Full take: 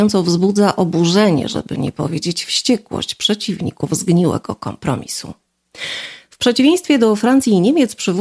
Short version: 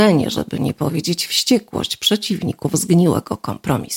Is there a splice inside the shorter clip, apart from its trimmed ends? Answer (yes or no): no